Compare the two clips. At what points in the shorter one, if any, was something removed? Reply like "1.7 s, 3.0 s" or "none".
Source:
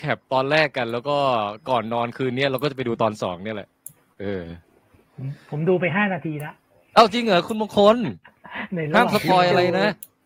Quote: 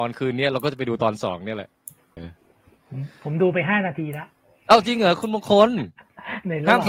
2.2 s